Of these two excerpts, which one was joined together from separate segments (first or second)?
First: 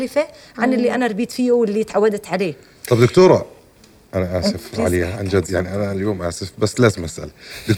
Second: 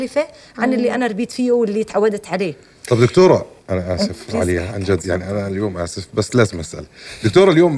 second